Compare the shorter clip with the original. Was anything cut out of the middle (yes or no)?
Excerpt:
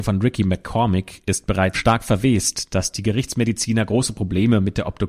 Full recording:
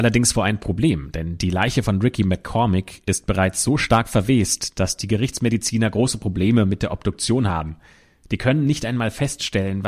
yes